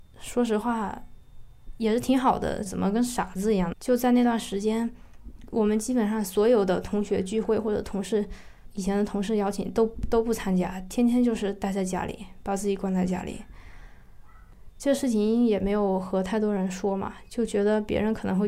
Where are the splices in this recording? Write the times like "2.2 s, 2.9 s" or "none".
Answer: 2.7 s, 3.7 s